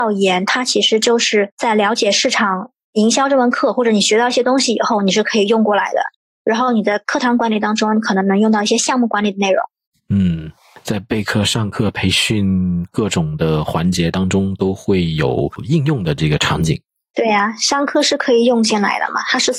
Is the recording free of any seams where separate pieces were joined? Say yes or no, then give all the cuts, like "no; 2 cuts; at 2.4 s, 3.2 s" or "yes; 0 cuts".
yes; 0 cuts